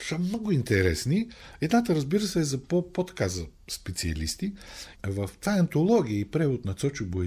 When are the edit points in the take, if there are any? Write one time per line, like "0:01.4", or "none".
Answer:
0:04.9